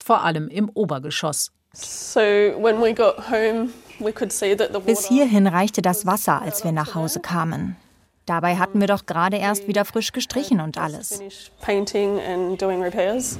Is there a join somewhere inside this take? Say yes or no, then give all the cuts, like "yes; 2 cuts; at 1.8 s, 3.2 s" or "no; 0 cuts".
yes; 1 cut; at 1.7 s